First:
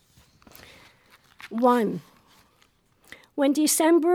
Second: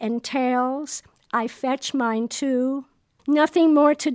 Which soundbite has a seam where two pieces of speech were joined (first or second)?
second